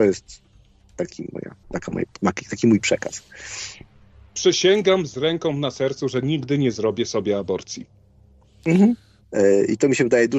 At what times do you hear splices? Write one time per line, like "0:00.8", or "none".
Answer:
0:01.6
0:09.2